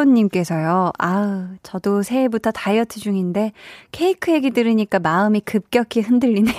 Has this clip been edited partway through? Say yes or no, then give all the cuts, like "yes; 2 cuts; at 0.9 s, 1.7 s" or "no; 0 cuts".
no; 0 cuts